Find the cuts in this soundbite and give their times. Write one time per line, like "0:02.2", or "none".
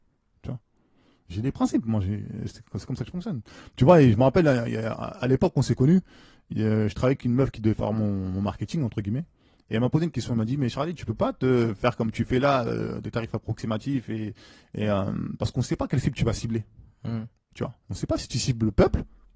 none